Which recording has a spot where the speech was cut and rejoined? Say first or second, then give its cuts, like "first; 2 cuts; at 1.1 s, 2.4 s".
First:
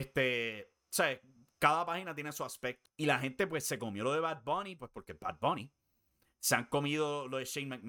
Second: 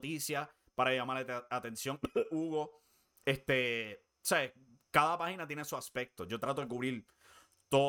first; 1 cut; at 2.9 s